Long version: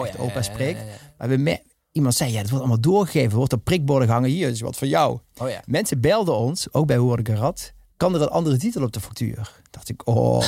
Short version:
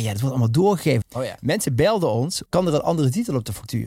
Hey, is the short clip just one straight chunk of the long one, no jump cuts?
no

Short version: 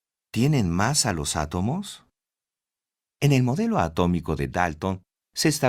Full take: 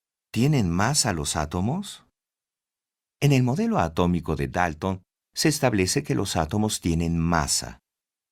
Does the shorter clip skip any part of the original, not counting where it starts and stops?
no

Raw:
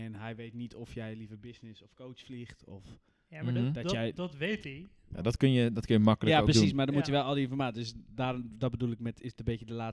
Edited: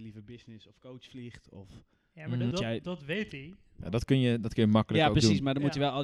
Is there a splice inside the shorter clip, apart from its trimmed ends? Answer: yes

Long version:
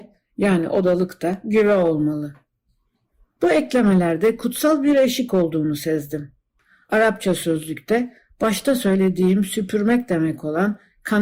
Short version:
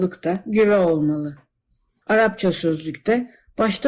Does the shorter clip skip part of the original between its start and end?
yes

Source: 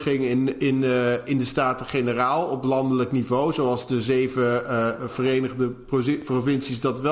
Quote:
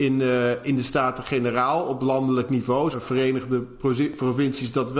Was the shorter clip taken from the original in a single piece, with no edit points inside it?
no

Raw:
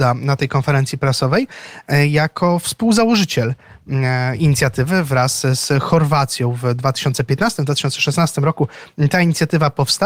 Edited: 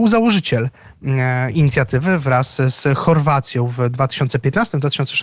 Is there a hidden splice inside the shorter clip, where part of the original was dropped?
no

